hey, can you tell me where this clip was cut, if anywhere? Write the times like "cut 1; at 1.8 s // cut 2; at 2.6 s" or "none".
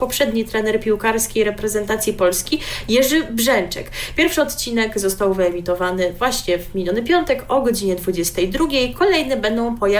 none